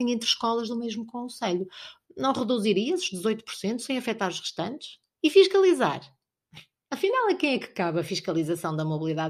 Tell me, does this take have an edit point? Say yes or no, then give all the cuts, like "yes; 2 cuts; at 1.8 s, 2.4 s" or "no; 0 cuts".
yes; 1 cut; at 2.0 s